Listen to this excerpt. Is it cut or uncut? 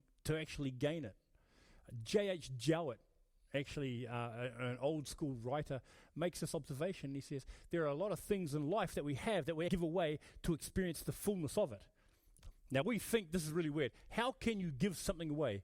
cut